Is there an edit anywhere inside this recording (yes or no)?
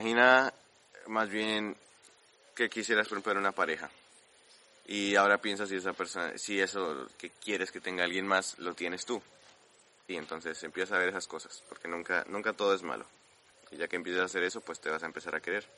yes